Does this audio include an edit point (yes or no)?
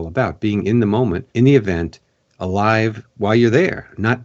yes